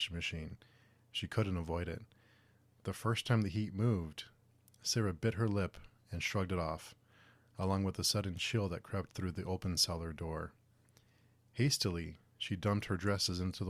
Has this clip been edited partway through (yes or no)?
no